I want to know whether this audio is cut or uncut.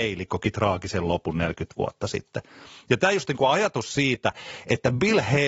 uncut